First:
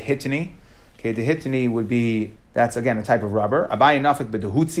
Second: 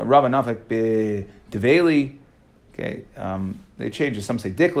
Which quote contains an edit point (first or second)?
first